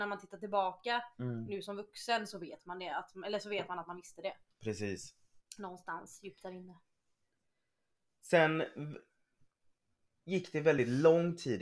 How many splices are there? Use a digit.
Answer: 0